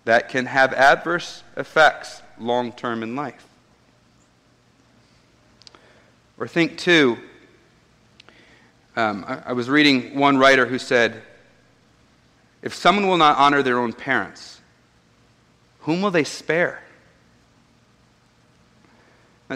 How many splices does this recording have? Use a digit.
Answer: 0